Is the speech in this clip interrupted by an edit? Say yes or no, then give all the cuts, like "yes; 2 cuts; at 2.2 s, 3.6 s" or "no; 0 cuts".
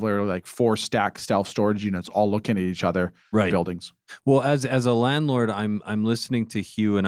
yes; 1 cut; at 3.5 s